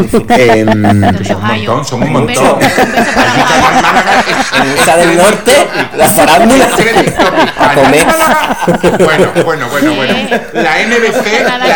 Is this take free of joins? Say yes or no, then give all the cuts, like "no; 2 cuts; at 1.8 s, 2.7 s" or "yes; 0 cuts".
yes; 0 cuts